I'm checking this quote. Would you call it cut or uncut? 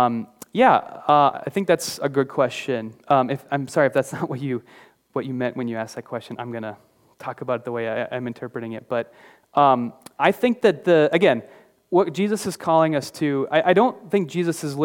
uncut